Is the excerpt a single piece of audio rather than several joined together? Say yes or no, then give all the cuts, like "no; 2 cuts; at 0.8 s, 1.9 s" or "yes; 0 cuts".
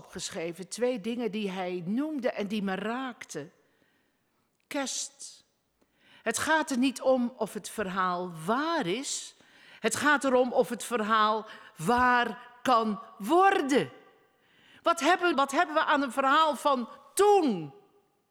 no; 1 cut; at 15.3 s